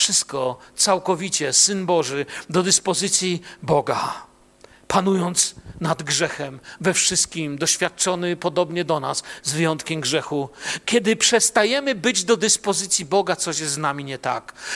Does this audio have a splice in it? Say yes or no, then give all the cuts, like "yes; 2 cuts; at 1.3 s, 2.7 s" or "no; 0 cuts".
no; 0 cuts